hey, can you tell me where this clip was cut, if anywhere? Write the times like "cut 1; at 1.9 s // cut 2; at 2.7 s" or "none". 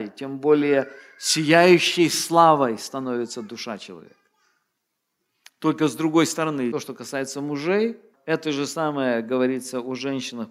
cut 1; at 5.4 s // cut 2; at 6.7 s // cut 3; at 8.1 s